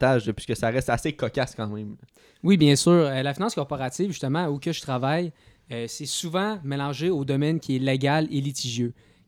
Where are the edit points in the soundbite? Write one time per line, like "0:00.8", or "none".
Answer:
none